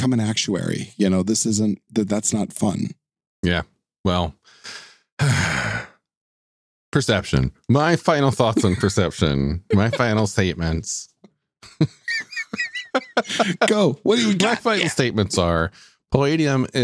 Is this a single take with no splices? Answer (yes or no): yes